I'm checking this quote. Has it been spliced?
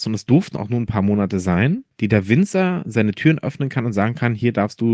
no; 0 cuts

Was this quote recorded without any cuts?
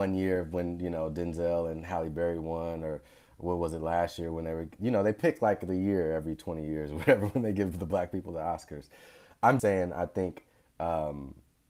no; 1 cut; at 9.6 s

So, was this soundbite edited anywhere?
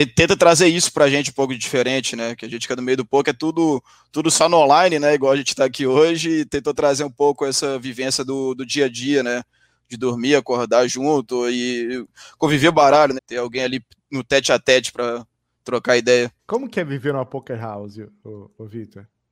yes; 2 cuts; at 13.2 s, 16.4 s

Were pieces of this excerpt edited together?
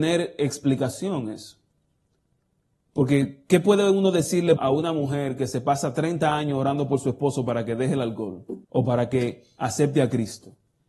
yes; 2 cuts; at 4.6 s, 8.6 s

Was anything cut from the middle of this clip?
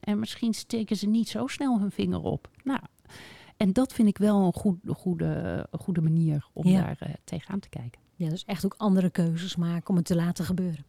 no; 0 cuts

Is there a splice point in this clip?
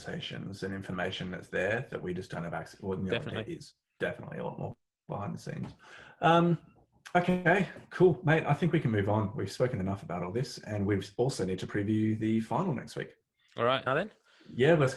yes; 1 cut; at 13.9 s

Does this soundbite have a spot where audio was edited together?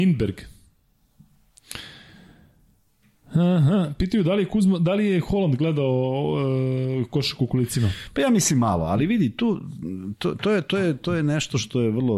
no; 0 cuts

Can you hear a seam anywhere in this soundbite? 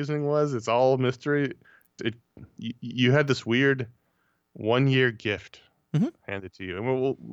yes; 1 cut; at 2.0 s

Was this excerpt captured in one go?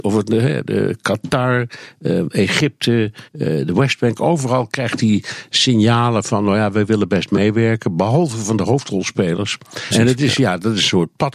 no; 2 cuts; at 3.3 s, 9.9 s

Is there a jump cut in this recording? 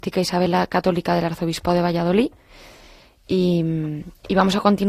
no; 0 cuts

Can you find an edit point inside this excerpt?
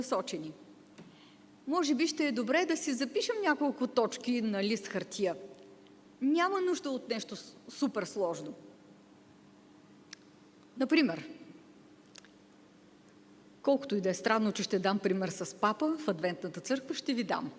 yes; 1 cut; at 6.0 s

